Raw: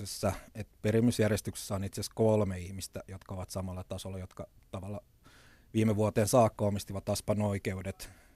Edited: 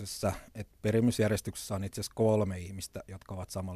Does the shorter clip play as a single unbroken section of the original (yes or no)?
yes